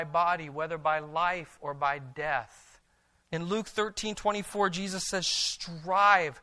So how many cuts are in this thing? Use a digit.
1